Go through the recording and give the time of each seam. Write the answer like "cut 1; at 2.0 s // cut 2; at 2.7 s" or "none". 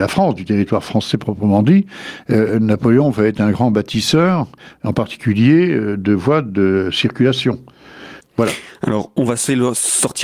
cut 1; at 8.2 s